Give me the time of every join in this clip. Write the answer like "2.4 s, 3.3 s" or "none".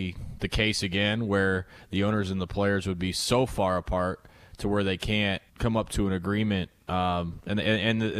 5.5 s